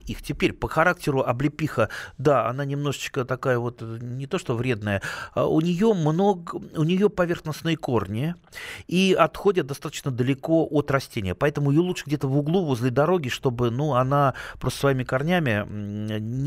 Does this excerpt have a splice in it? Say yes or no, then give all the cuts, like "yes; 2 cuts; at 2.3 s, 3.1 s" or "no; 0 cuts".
no; 0 cuts